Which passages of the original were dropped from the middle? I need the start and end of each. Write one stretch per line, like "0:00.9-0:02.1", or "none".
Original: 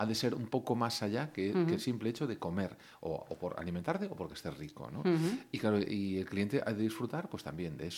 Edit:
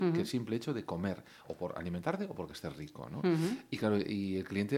0:03.0-0:03.3